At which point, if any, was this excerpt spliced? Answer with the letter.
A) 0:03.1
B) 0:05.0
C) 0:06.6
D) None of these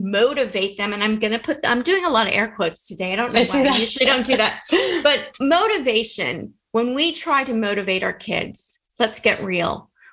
D